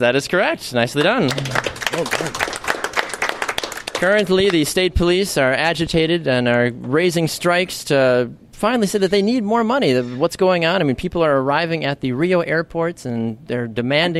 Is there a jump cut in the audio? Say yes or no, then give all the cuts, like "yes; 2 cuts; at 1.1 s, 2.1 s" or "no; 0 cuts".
no; 0 cuts